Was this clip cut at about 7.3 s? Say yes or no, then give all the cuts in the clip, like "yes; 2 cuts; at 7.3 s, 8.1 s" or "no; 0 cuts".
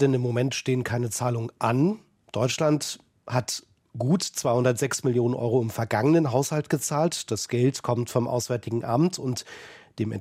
no; 0 cuts